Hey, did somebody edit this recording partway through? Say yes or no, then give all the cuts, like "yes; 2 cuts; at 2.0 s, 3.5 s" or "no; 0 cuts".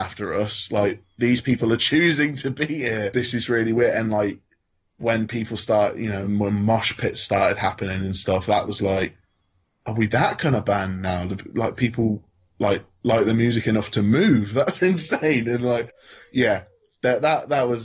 no; 0 cuts